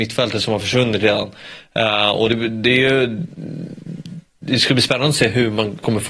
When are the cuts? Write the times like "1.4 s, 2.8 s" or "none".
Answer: none